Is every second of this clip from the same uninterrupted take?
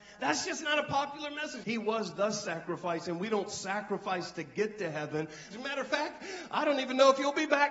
no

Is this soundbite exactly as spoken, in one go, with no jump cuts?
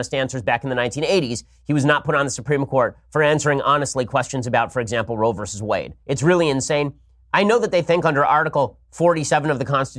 no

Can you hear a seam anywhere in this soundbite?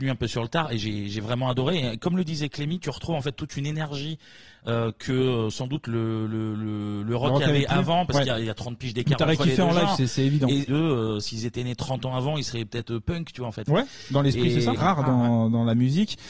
yes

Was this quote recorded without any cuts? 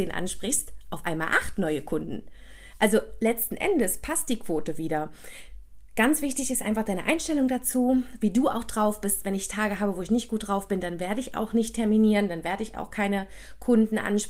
yes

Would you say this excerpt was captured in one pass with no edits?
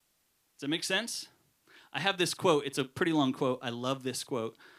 yes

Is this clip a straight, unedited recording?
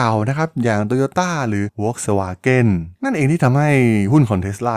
no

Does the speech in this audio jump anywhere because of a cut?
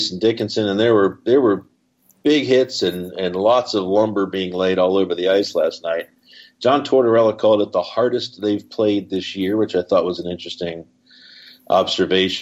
no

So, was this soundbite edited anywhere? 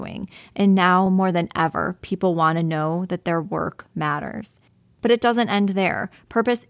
no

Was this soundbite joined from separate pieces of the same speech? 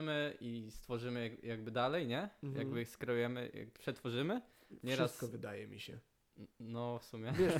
no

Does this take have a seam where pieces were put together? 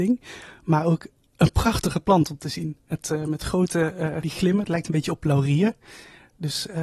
yes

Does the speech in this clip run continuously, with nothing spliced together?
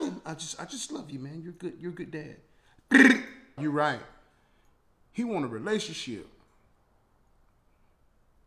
no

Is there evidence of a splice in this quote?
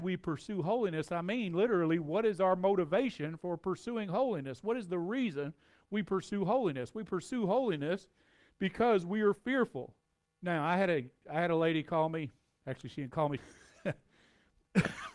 yes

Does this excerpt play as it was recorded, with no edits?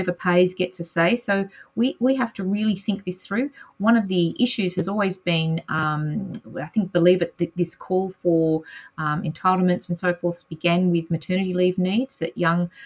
yes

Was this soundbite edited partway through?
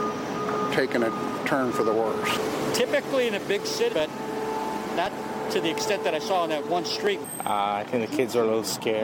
yes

